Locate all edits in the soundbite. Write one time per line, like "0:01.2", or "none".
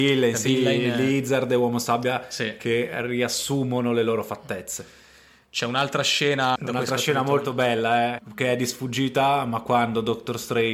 0:06.6
0:08.2